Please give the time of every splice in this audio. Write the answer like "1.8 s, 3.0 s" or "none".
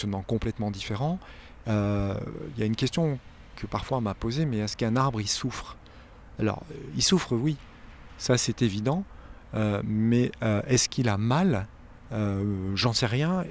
none

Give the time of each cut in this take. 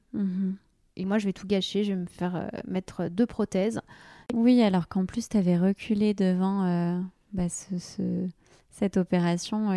none

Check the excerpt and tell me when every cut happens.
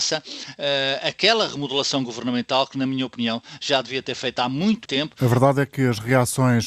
4.9 s

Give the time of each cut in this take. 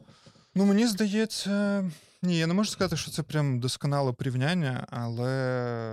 none

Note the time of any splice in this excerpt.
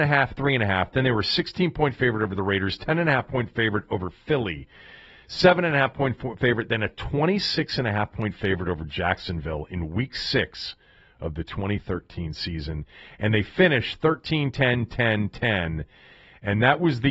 none

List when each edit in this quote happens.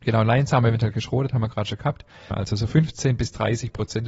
2.3 s

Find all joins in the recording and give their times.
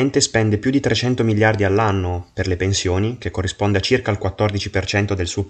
none

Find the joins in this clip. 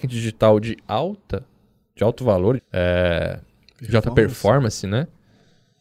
2.6 s

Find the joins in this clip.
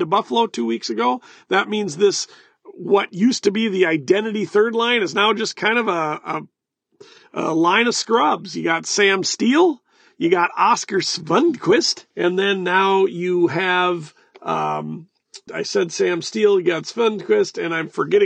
12.1 s, 15.5 s

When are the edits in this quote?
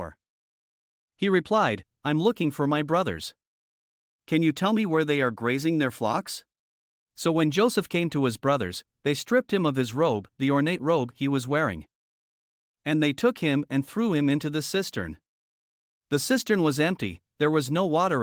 6.9 s

